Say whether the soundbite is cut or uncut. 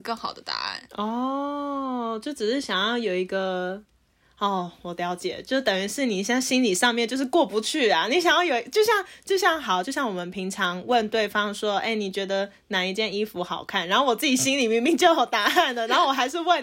uncut